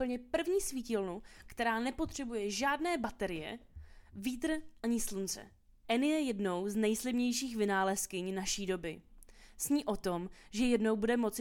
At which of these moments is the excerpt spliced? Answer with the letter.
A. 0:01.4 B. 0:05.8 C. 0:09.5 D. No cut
B